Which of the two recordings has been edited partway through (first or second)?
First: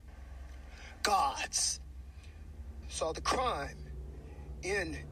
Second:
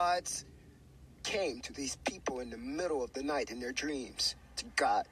first